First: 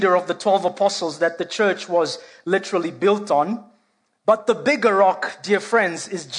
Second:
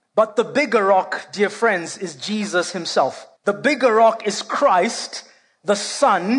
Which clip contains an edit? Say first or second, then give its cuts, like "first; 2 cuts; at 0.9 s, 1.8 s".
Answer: second; 1 cut; at 3.4 s